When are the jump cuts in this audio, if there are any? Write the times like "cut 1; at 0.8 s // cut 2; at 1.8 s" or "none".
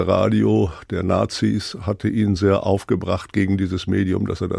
cut 1; at 2.4 s